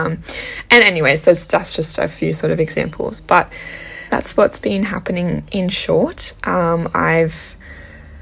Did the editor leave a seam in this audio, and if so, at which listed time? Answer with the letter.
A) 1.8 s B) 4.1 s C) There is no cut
B